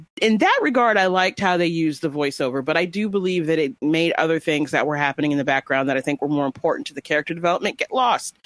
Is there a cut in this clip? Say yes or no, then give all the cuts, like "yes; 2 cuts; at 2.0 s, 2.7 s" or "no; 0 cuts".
no; 0 cuts